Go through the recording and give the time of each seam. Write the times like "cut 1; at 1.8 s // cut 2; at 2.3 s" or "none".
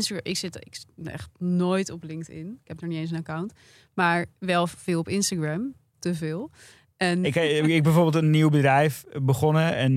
cut 1; at 7.2 s